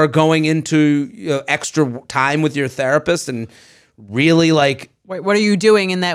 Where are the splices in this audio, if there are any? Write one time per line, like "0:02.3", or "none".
none